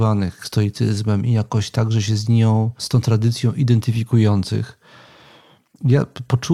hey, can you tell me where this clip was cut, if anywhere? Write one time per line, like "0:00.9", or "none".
0:02.8